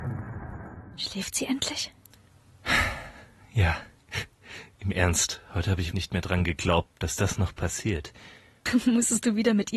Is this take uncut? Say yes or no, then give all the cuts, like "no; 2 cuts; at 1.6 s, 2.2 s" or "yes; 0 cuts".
no; 2 cuts; at 5.9 s, 8.7 s